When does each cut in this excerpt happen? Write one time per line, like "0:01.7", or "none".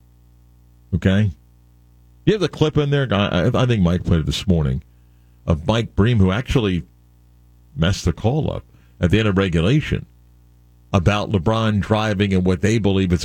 none